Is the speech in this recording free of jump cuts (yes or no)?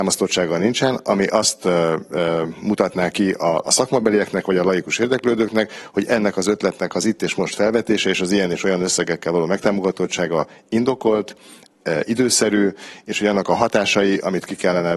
yes